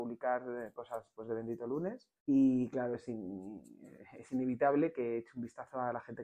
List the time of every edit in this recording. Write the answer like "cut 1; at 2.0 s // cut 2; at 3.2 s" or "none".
cut 1; at 2.2 s